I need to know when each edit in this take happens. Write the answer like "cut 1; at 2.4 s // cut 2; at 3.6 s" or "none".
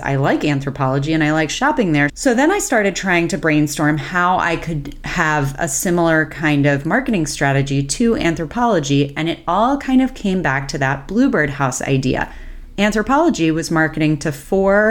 cut 1; at 2.1 s